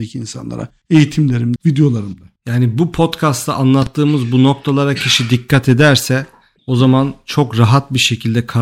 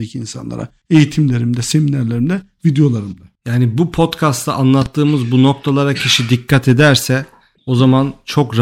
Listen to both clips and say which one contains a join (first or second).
first